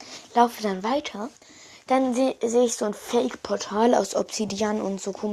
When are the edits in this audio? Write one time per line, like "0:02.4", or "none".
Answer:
none